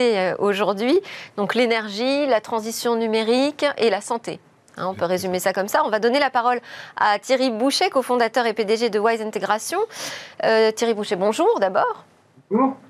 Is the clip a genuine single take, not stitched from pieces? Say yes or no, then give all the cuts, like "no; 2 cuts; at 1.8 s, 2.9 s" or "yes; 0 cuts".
yes; 0 cuts